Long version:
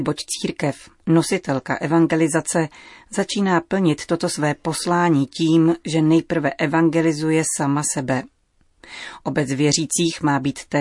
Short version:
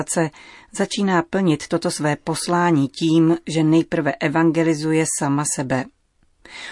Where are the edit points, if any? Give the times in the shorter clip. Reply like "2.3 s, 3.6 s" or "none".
none

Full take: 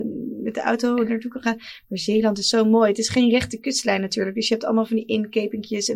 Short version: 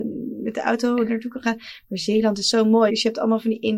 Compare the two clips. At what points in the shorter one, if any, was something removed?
2.9 s

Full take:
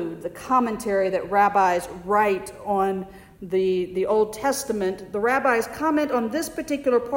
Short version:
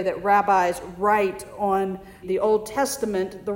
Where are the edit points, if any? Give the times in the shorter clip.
2.2 s

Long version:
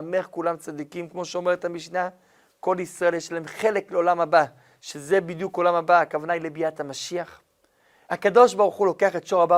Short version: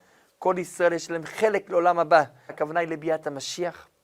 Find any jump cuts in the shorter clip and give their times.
2.5 s

